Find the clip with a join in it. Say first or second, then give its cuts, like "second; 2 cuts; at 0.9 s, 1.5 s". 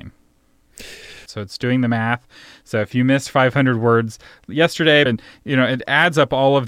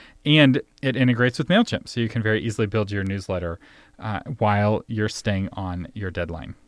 first; 2 cuts; at 1.3 s, 5.1 s